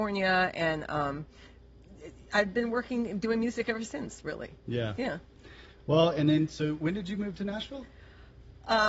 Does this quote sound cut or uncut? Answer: uncut